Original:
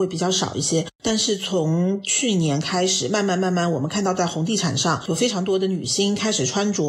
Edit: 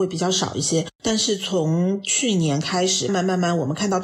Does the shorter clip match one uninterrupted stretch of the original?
no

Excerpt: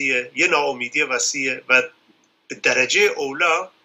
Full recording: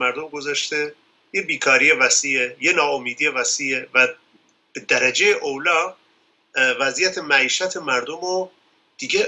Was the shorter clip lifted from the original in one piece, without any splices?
yes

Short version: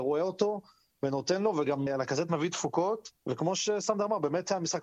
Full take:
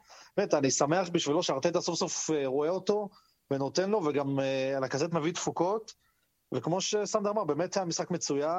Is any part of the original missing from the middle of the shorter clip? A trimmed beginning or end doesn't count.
yes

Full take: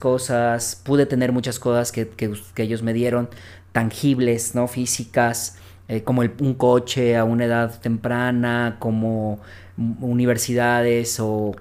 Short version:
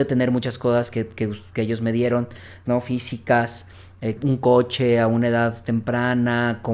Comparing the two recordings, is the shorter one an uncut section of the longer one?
no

